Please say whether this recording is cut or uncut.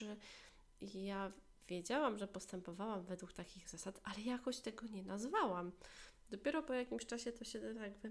uncut